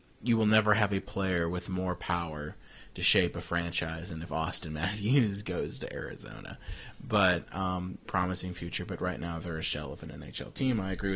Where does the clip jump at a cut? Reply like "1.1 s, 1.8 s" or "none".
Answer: 8.1 s